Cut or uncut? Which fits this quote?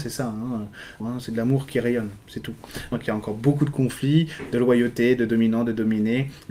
cut